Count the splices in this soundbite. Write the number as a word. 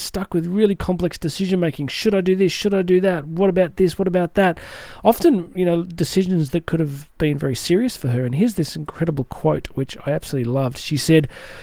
zero